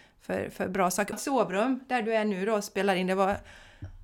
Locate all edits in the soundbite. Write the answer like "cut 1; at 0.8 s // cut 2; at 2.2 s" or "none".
cut 1; at 1.1 s